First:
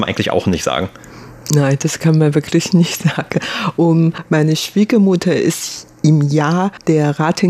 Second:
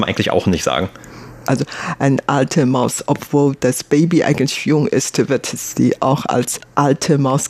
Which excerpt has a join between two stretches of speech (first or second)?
second